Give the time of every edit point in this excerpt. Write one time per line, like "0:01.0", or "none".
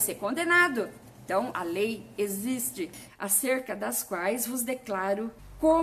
0:01.5
0:03.1

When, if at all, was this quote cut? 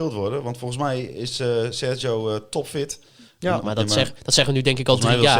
0:03.6

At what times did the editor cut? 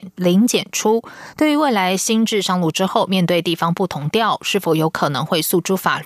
none

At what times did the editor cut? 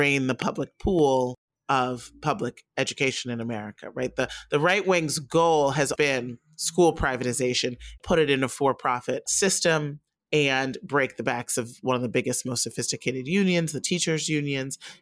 0:05.9
0:08.0

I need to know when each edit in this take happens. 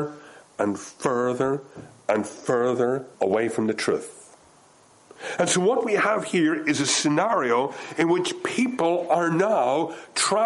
0:03.1

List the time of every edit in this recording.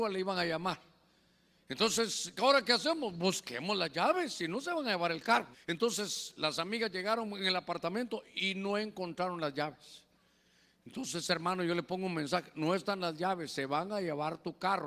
0:05.5

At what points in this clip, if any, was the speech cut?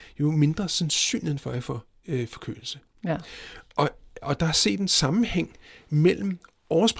none

